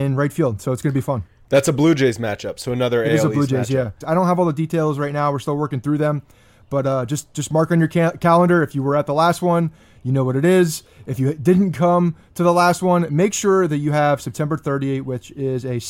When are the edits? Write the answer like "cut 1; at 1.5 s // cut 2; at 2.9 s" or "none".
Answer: cut 1; at 4.0 s

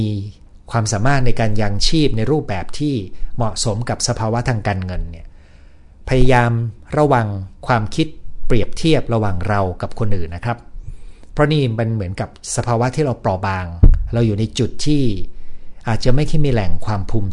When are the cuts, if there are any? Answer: cut 1; at 7.6 s // cut 2; at 10.3 s

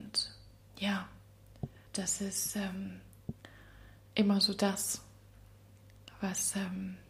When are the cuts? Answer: cut 1; at 1.9 s

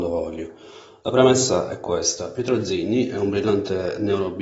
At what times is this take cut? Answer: none

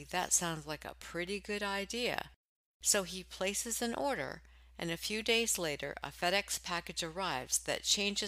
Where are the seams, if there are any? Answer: none

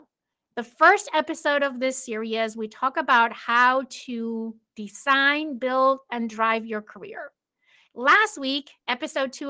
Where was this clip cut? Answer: cut 1; at 7.9 s

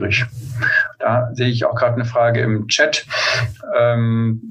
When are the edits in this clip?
none

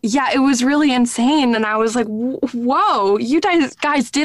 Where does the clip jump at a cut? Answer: none

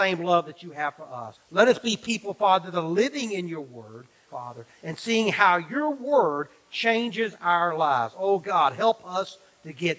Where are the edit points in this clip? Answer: cut 1; at 1.4 s // cut 2; at 4.3 s

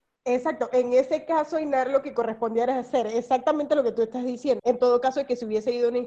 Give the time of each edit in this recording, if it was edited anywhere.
cut 1; at 4.6 s

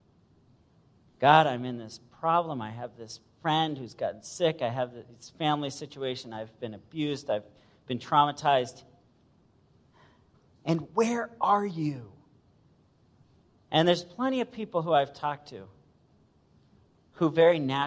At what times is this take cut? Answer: none

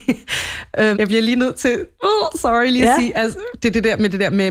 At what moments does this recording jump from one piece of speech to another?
cut 1; at 0.9 s

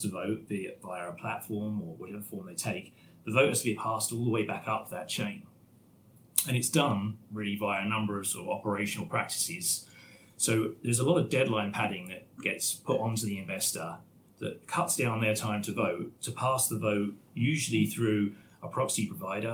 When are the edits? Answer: none

